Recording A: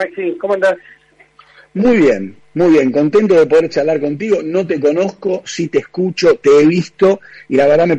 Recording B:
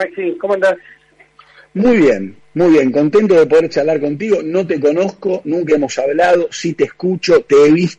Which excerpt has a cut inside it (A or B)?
A